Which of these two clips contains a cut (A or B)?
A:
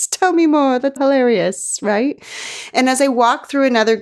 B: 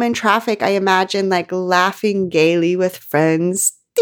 A